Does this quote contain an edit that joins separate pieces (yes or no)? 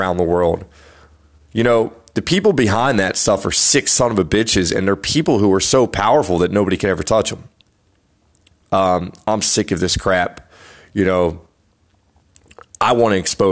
yes